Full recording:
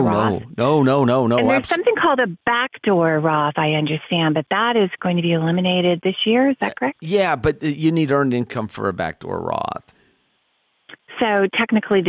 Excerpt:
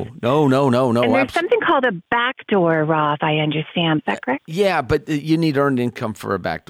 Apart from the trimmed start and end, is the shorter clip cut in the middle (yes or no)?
yes